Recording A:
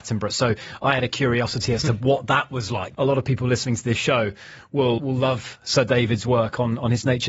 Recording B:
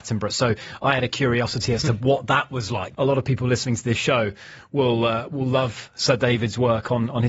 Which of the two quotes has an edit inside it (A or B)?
A